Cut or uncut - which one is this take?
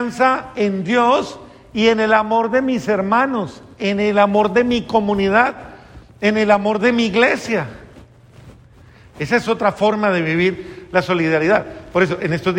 uncut